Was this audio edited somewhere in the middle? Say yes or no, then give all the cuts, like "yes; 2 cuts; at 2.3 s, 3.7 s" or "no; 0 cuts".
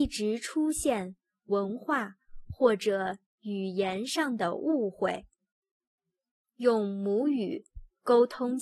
no; 0 cuts